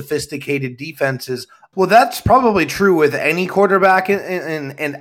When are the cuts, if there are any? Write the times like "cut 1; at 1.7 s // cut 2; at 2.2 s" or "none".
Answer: cut 1; at 1.7 s

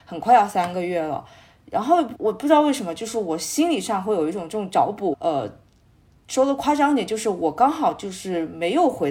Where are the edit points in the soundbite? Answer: cut 1; at 2.1 s // cut 2; at 5.1 s

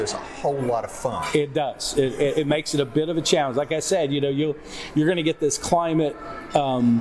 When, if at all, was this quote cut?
none

